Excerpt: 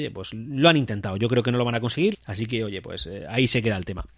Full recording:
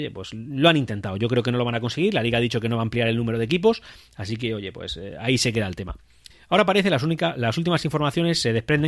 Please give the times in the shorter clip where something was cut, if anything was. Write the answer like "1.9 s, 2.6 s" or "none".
2.1 s

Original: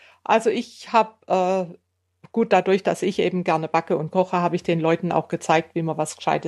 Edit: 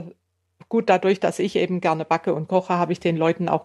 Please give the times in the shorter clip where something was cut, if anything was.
none

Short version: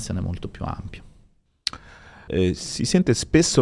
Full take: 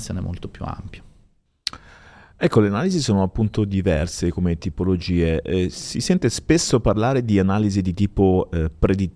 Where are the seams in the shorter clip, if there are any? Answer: 2.3 s

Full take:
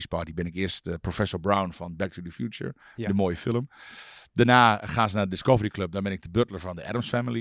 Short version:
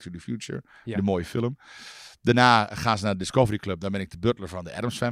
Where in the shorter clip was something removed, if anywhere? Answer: none

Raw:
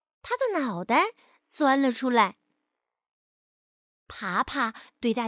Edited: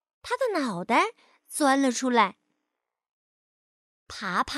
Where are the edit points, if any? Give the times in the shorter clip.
none

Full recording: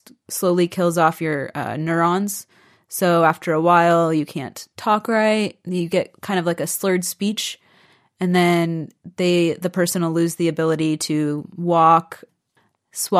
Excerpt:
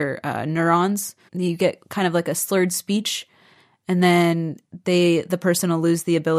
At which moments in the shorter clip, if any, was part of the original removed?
1.3 s

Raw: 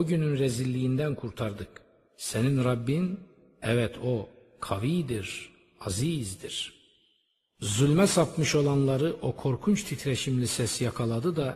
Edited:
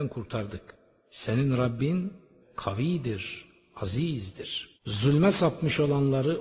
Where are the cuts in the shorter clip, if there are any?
2.4 s, 4.7 s

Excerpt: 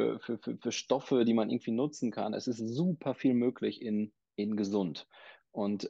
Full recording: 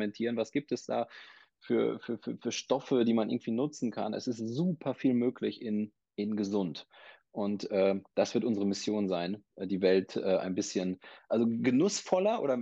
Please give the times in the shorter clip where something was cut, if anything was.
none

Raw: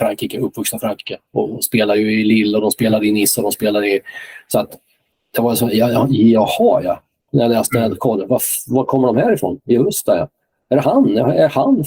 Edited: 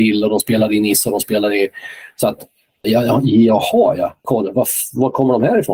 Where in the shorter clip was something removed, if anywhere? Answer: 2.8 s, 4.2 s

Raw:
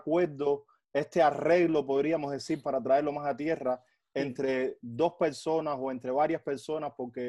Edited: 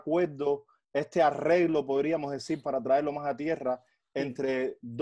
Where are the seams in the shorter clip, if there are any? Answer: none

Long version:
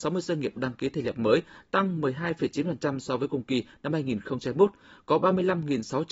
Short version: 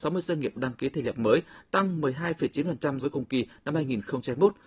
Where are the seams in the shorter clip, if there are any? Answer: 3.0 s

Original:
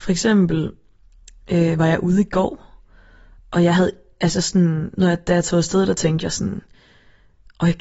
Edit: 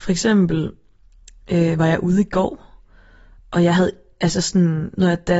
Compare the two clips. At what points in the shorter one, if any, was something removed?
none

